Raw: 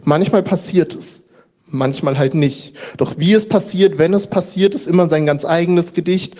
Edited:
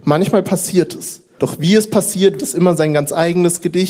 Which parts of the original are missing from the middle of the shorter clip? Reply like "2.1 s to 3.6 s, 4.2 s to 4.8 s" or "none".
1.4 s to 3.0 s, 4.0 s to 4.7 s